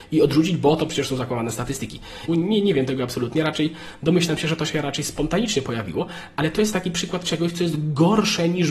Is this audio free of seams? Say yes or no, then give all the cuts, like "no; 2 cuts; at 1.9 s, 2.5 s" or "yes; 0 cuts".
no; 1 cut; at 2.3 s